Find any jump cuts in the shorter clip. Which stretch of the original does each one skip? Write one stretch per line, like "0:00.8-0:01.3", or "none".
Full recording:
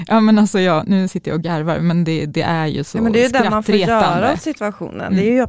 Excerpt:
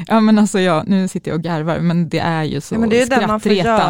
0:02.0-0:02.3